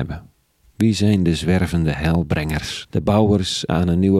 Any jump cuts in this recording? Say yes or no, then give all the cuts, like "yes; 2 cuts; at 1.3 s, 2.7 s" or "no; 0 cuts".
yes; 1 cut; at 2.9 s